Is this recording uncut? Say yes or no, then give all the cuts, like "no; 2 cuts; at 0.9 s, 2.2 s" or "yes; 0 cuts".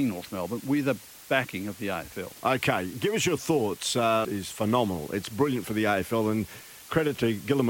no; 1 cut; at 4.2 s